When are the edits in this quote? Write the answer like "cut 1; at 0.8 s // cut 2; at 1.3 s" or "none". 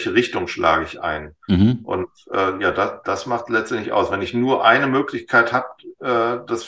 none